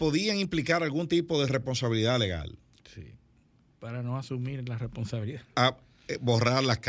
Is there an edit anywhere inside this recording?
no; 0 cuts

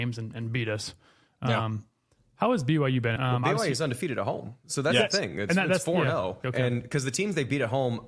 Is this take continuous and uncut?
no; 2 cuts; at 3.2 s, 6.4 s

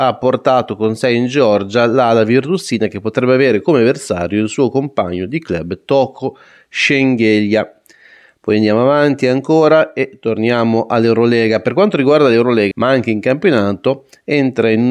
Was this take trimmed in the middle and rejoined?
yes; 1 cut; at 12.7 s

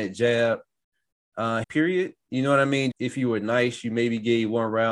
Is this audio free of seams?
no; 2 cuts; at 1.6 s, 2.9 s

